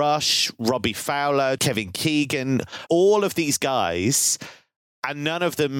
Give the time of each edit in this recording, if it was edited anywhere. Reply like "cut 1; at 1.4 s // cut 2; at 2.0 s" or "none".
cut 1; at 1.6 s // cut 2; at 2.9 s